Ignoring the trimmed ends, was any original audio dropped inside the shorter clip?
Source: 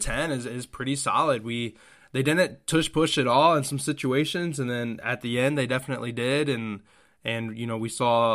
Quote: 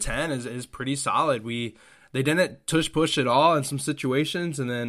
no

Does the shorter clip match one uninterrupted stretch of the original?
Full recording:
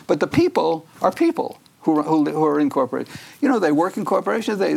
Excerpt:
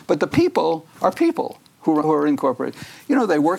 no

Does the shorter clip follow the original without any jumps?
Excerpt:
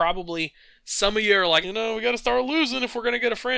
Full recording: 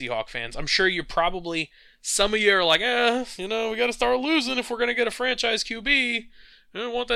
no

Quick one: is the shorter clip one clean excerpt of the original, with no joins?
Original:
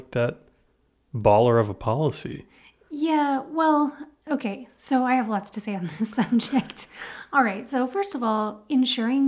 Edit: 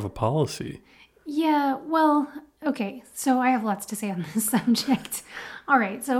yes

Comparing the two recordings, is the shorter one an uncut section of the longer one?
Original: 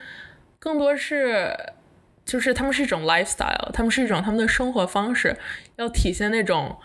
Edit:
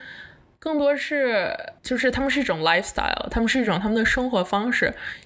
no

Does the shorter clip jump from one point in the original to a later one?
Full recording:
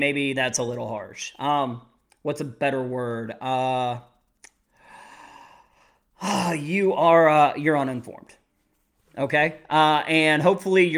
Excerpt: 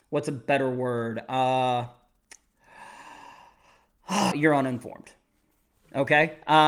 yes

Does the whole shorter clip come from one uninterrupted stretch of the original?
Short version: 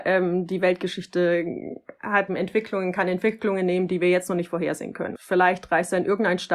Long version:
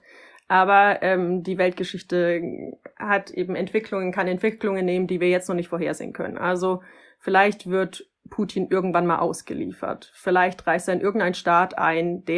no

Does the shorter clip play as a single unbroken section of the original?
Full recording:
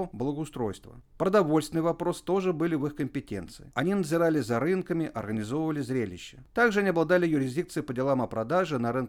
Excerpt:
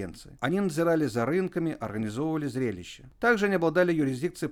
yes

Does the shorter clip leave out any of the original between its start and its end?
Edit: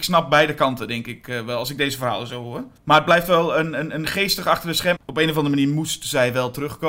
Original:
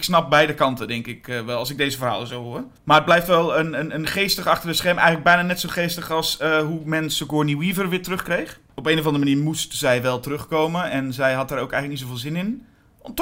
yes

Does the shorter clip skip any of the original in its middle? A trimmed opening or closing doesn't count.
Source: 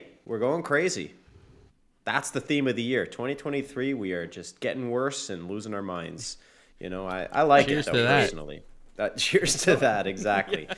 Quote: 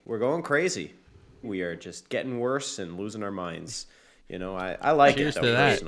yes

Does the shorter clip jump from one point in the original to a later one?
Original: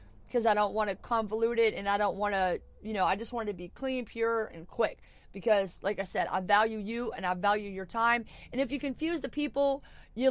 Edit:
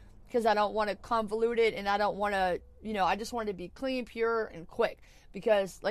no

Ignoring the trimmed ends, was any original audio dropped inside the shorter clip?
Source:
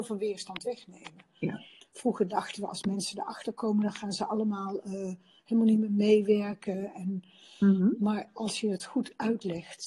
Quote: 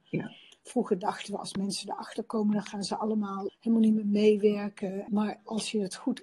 yes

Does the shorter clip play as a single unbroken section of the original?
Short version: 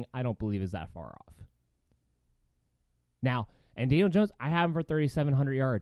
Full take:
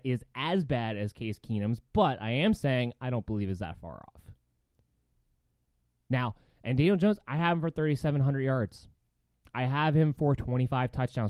yes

